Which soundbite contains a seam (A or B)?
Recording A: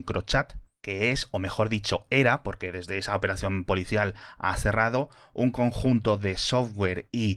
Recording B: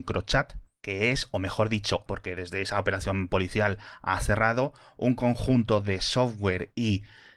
B